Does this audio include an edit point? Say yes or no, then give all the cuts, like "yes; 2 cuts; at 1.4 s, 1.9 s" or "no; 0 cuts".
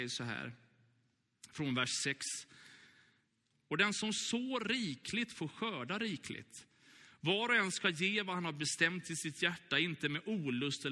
yes; 1 cut; at 3.5 s